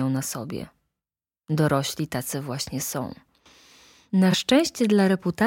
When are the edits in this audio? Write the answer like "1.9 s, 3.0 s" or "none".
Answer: none